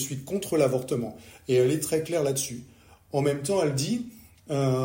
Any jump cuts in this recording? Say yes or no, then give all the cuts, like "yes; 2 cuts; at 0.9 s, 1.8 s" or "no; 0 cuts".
no; 0 cuts